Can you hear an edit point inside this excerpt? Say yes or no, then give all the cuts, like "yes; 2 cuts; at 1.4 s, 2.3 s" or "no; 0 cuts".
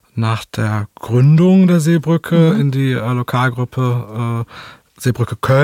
no; 0 cuts